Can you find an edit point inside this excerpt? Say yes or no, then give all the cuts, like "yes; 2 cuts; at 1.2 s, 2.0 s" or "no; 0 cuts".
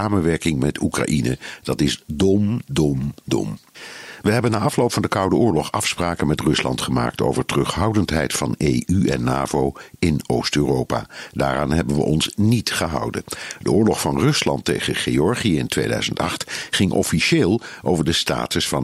no; 0 cuts